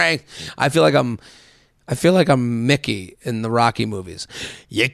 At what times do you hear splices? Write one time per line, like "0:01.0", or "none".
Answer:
none

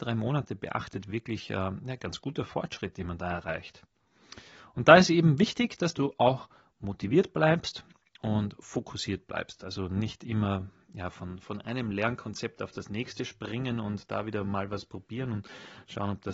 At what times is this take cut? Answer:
none

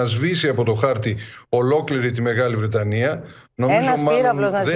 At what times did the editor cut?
none

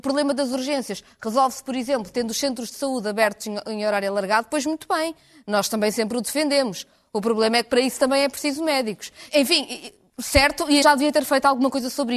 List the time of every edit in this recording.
0:09.3
0:10.8

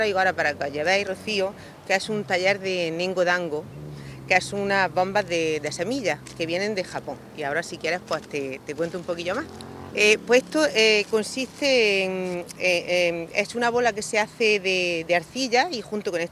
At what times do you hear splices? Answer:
0:09.9

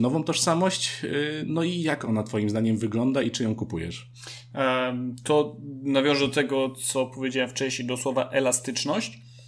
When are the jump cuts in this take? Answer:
none

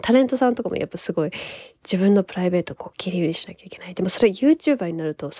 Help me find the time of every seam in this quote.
none

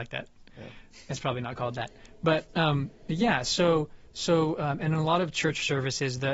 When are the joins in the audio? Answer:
none

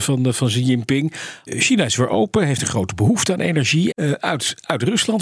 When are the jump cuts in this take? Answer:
0:01.5
0:03.9

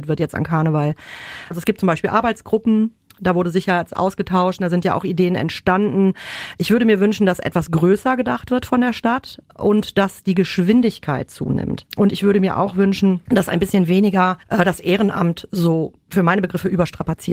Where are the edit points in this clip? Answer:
0:14.4

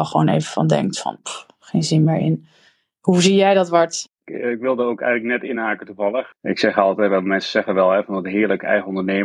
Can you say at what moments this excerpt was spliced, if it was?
0:06.3

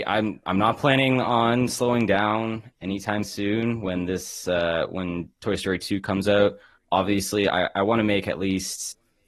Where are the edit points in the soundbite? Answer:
none

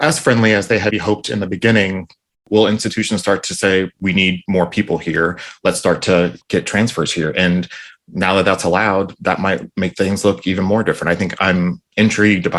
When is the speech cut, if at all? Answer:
0:00.9

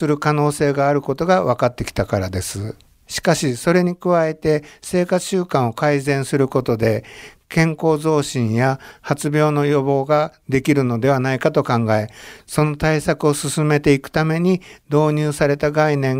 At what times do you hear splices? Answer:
0:02.9

